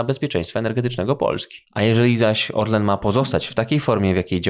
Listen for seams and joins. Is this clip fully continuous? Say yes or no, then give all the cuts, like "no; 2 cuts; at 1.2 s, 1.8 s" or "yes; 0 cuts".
no; 1 cut; at 1.6 s